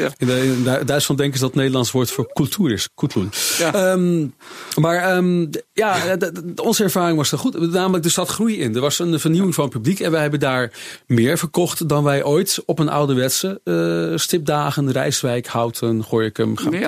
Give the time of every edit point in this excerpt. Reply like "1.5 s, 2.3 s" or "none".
none